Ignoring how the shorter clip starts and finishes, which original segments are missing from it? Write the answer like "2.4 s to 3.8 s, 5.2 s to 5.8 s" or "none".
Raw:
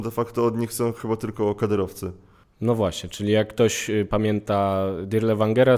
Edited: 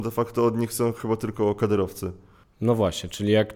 none